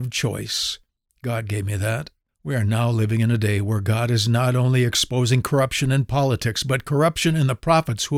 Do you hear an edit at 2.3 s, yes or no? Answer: yes